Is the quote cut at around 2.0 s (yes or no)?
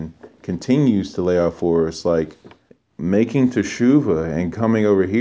no